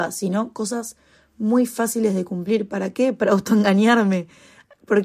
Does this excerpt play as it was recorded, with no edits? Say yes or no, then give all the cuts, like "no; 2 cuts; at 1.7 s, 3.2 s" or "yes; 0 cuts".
yes; 0 cuts